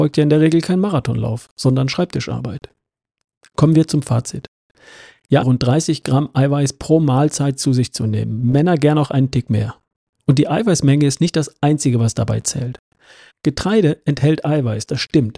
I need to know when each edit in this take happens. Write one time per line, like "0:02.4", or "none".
0:05.4
0:13.3